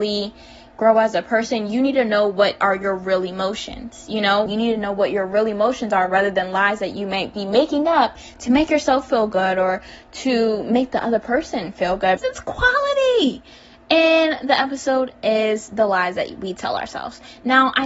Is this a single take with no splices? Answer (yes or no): no